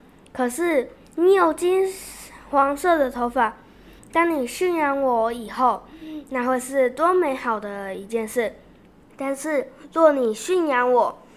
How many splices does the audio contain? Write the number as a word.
two